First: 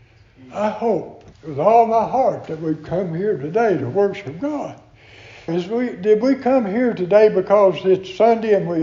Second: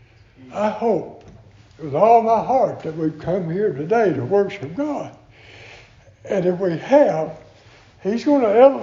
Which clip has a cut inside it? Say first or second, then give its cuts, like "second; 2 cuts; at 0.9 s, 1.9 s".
first; 2 cuts; at 1.3 s, 5.5 s